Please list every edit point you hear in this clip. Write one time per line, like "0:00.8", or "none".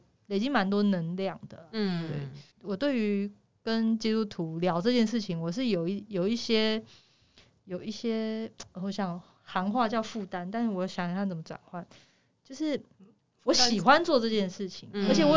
0:02.5